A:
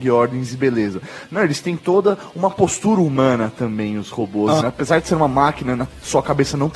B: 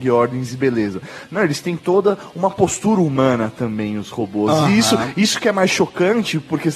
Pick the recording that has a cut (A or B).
A